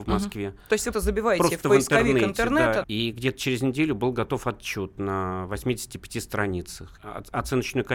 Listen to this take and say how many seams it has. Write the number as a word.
three